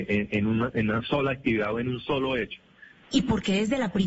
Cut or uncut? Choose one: cut